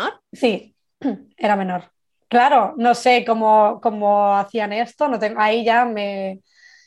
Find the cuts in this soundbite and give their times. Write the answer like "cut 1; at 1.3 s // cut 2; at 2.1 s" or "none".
cut 1; at 2.2 s